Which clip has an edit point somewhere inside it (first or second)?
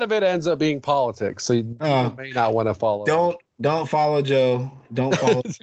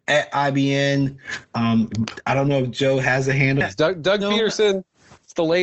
second